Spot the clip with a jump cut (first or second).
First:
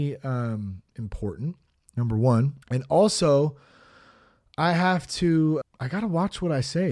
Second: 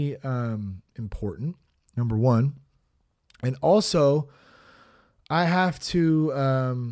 first